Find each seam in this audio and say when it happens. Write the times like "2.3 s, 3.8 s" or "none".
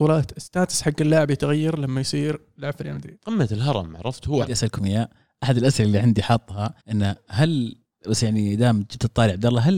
4.4 s, 6.8 s

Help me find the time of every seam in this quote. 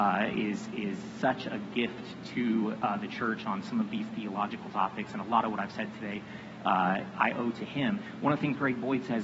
none

